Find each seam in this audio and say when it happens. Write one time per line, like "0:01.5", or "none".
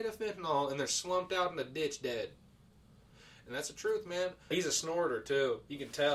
0:04.5